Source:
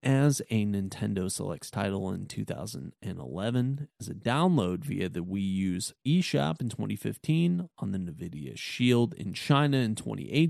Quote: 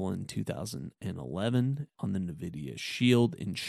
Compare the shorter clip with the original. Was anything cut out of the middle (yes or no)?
yes